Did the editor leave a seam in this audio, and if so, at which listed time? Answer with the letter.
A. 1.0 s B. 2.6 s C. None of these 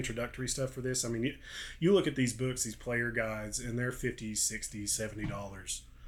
C